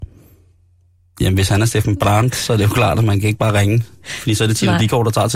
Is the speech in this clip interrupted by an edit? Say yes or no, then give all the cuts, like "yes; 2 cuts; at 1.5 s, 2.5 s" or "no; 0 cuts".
no; 0 cuts